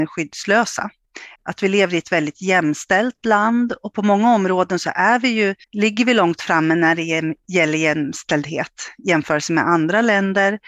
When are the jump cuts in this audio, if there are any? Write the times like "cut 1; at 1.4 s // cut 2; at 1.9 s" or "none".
cut 1; at 1.4 s // cut 2; at 5.6 s

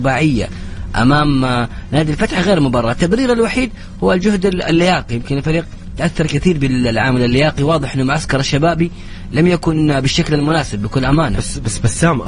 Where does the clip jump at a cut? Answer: none

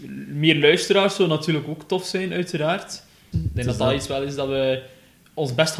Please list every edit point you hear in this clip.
cut 1; at 3.3 s

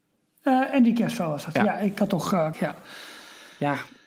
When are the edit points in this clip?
cut 1; at 2.5 s

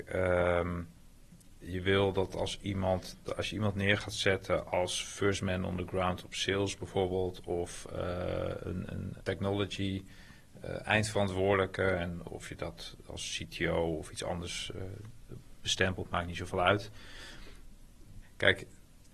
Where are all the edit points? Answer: cut 1; at 9.2 s // cut 2; at 18.2 s

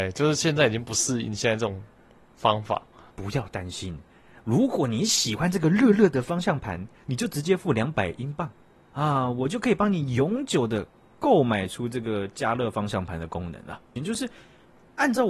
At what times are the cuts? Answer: cut 1; at 3.1 s // cut 2; at 14.0 s

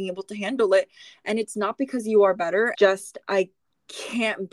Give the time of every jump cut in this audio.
cut 1; at 2.7 s

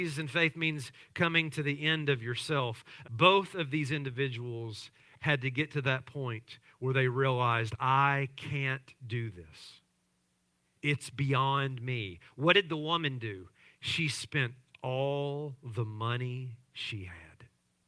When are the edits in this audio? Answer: cut 1; at 3.0 s

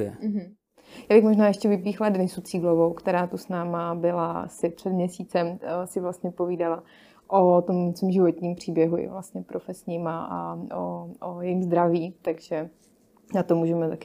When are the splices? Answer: none

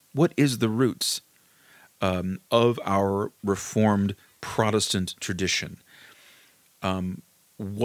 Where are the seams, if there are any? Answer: none

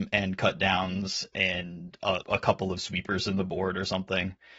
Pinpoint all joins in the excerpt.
cut 1; at 2.2 s

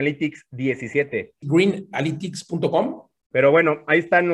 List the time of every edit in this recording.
cut 1; at 1.4 s // cut 2; at 3.2 s

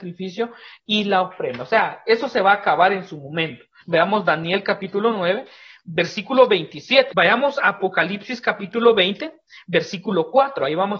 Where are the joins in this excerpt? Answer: cut 1; at 3.8 s // cut 2; at 7.1 s

